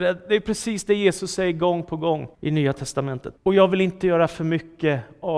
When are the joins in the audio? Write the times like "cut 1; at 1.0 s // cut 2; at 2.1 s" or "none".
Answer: cut 1; at 2.3 s // cut 2; at 3.4 s